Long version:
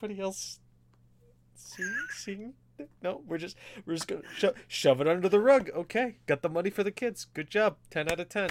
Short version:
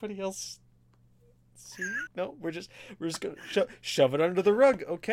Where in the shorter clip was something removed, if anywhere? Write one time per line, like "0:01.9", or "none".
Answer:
0:02.1